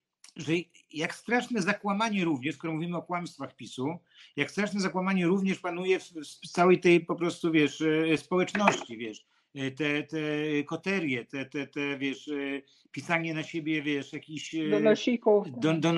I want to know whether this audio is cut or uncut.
uncut